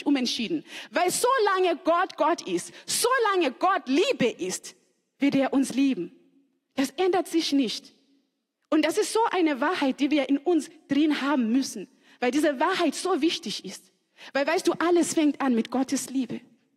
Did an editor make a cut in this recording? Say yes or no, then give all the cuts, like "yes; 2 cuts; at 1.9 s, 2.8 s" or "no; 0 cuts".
no; 0 cuts